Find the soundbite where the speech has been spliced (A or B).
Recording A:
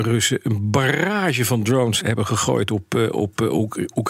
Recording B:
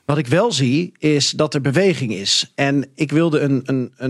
A